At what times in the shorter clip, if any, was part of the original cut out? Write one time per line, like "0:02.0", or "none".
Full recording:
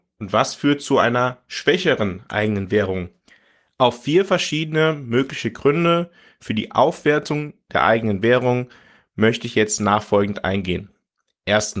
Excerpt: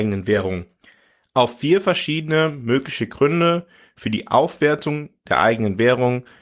none